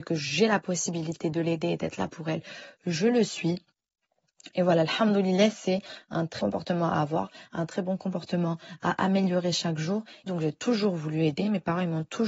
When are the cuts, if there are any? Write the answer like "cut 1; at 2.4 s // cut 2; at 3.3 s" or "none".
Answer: cut 1; at 6.4 s // cut 2; at 10.3 s